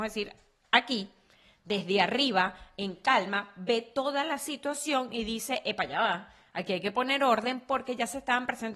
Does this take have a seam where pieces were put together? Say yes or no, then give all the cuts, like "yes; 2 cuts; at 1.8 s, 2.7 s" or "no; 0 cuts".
no; 0 cuts